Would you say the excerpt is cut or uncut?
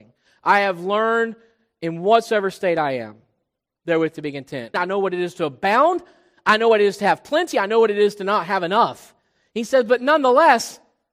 cut